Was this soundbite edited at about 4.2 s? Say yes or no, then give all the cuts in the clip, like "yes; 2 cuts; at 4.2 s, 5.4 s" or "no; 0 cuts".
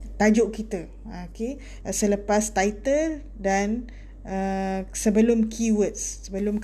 no; 1 cut; at 1.8 s